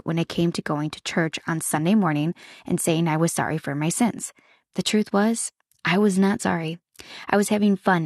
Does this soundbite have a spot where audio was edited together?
no; 0 cuts

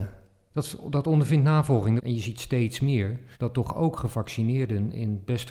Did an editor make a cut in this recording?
yes; 2 cuts; at 2.0 s, 3.3 s

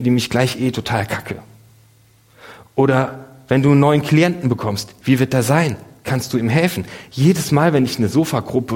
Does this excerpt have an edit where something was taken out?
no; 0 cuts

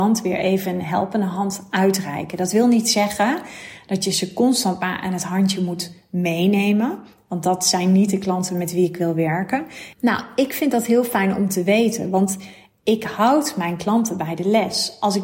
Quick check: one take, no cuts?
no; 1 cut; at 9.9 s

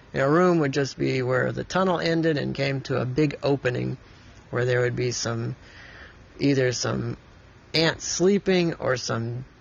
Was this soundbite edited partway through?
no; 0 cuts

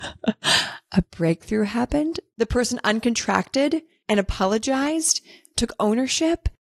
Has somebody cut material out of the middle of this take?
yes; 1 cut; at 2.3 s

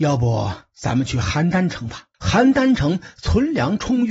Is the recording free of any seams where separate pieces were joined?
no; 1 cut; at 2.1 s

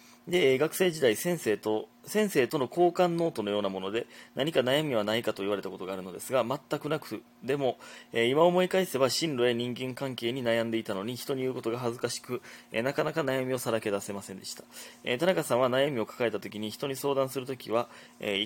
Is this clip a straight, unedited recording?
yes; 0 cuts

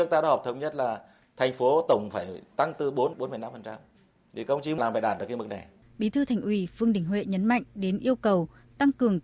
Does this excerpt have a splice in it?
yes; 1 cut; at 5.8 s

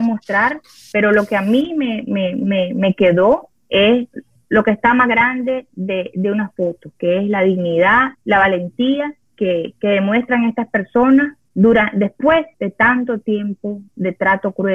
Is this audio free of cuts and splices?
no; 2 cuts; at 8.1 s, 11.4 s

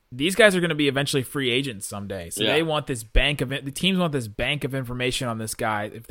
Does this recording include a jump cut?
no; 0 cuts

